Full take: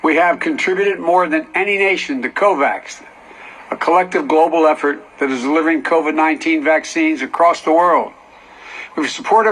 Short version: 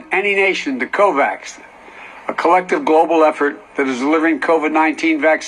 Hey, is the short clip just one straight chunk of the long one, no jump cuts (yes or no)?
yes